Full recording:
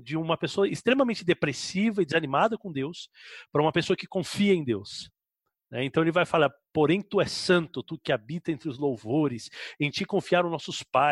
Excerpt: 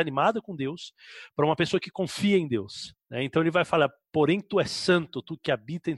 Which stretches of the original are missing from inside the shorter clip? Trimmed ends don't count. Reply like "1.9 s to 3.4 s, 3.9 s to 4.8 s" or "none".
5.2 s to 5.6 s